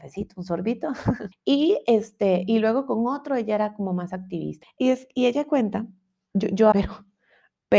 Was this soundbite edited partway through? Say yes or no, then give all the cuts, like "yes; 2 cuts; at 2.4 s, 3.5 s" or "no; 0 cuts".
yes; 3 cuts; at 1.3 s, 4.6 s, 6.7 s